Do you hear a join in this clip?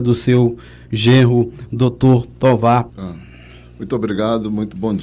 yes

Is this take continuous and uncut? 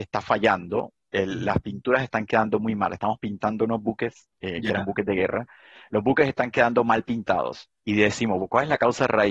yes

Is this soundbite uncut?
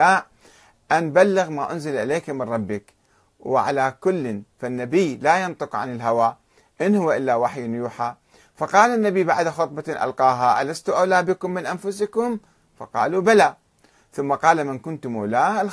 yes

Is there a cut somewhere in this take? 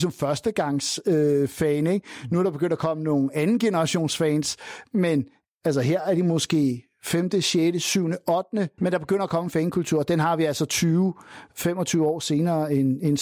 yes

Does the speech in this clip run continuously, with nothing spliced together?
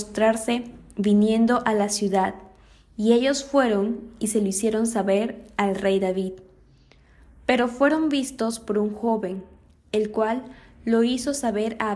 yes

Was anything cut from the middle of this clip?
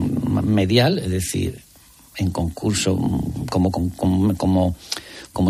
no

